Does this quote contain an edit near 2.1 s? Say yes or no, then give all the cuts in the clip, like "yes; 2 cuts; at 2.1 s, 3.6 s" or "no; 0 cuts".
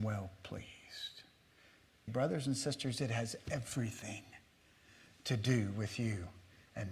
yes; 1 cut; at 2.1 s